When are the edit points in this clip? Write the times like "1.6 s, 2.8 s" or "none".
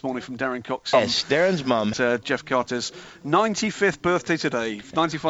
0.9 s, 1.9 s